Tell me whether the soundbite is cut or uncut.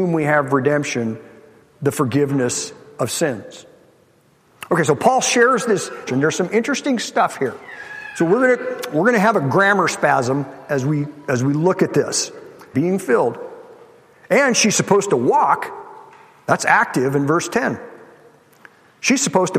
cut